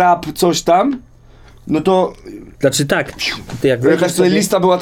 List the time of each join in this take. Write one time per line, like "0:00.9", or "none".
0:02.5
0:03.6